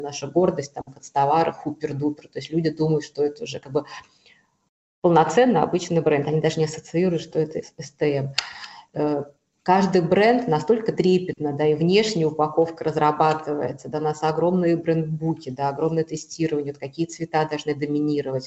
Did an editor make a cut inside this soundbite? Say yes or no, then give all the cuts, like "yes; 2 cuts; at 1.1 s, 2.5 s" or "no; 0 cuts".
no; 0 cuts